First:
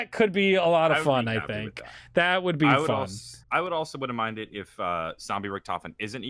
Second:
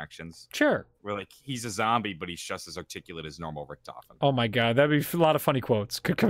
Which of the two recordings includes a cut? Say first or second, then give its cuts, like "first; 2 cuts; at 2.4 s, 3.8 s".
first; 1 cut; at 3.4 s